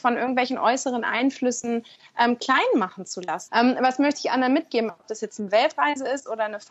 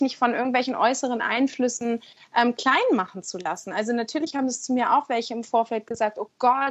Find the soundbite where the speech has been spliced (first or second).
first